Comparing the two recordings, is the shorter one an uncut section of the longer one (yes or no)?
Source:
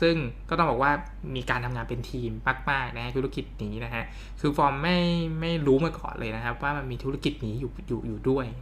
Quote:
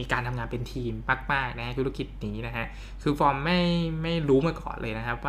yes